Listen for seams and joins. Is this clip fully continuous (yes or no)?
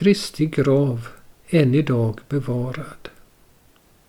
yes